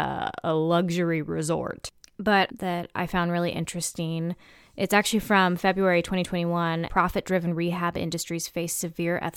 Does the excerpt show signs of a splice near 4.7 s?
no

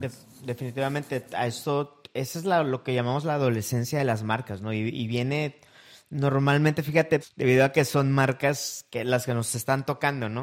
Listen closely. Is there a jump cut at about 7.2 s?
yes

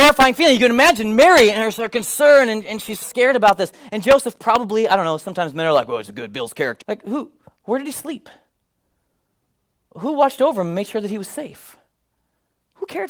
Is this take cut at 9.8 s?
no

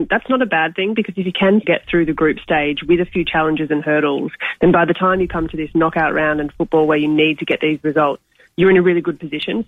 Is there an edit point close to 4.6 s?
no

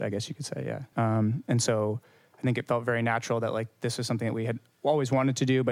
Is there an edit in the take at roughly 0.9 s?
yes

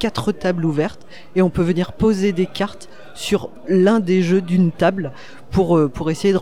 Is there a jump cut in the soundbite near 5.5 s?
no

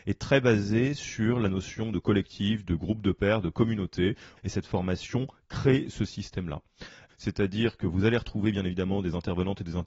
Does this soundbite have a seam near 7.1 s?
yes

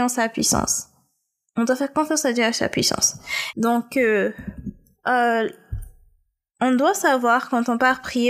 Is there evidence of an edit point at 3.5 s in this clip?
yes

